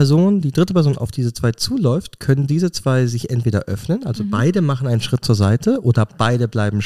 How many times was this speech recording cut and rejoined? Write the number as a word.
zero